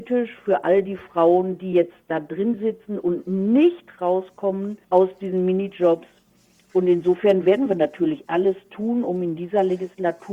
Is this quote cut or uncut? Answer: cut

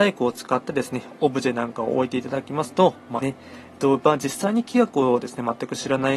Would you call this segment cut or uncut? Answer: cut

